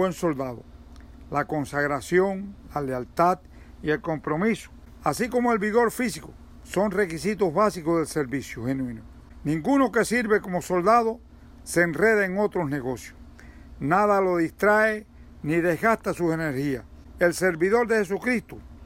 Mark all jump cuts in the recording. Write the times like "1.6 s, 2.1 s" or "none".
15.4 s